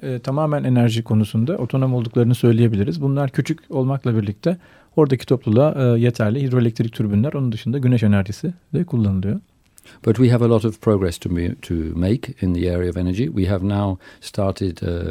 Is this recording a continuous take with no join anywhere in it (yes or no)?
yes